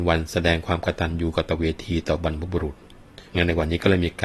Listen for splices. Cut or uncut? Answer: cut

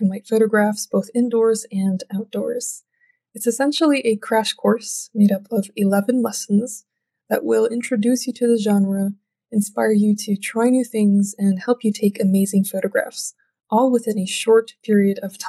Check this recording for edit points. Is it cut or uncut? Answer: uncut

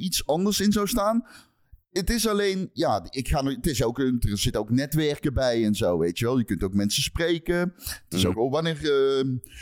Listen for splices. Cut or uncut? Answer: cut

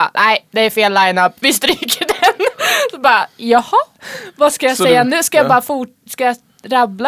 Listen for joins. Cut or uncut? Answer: uncut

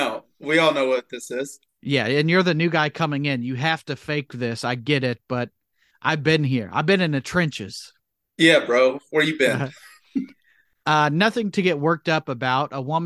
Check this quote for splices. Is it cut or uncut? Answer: uncut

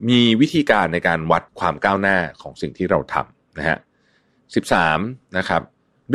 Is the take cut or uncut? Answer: cut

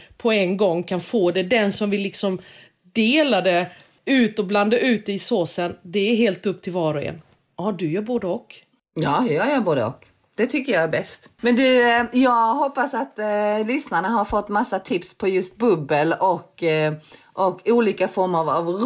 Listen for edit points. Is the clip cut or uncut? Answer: uncut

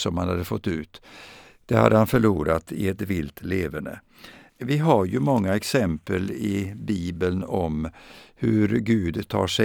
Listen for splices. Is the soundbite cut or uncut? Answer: cut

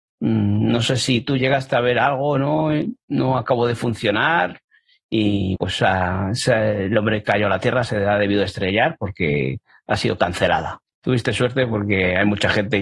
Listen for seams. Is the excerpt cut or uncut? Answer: cut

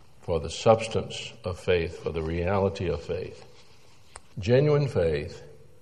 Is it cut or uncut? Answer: cut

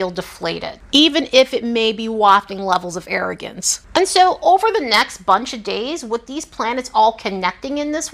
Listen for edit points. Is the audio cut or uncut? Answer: uncut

